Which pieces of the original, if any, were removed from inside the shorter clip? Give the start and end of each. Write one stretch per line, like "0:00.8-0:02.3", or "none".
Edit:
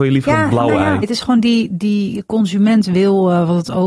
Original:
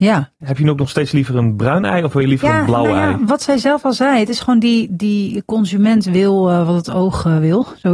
0:03.2-0:04.2